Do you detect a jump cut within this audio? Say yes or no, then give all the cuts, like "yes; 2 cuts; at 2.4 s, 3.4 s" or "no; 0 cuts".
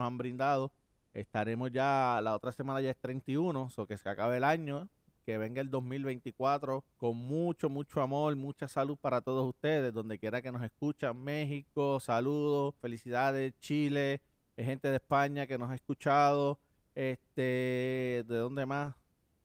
yes; 2 cuts; at 6.9 s, 12.8 s